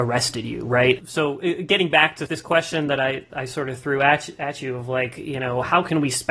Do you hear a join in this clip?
yes; 1 cut; at 1.0 s

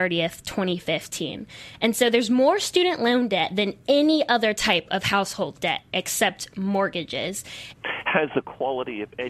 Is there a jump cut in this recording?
yes; 1 cut; at 7.7 s

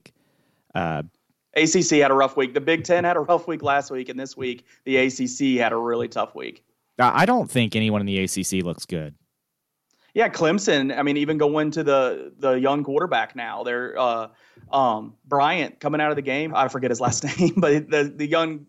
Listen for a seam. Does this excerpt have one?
yes; 1 cut; at 16.5 s

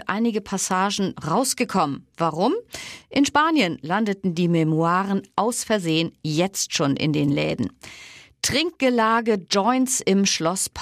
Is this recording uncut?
no; 1 cut; at 1.1 s

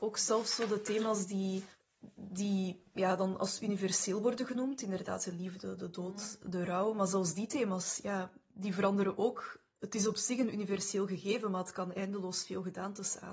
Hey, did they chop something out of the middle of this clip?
no; 0 cuts

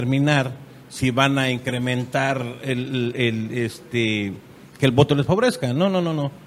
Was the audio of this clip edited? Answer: no; 0 cuts

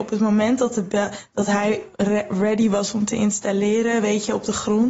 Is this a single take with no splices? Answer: yes; 0 cuts

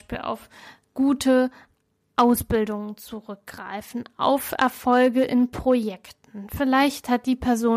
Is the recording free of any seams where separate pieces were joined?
yes; 0 cuts

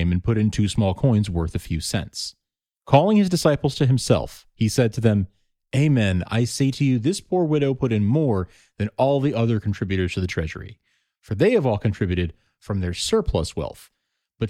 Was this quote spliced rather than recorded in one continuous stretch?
no; 0 cuts

